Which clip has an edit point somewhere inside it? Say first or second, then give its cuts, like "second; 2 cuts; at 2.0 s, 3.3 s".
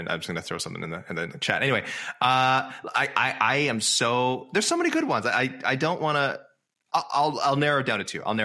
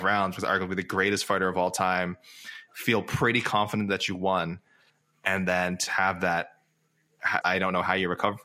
second; 2 cuts; at 5.9 s, 7.4 s